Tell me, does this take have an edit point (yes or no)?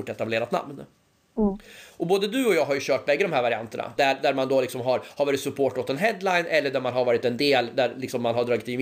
yes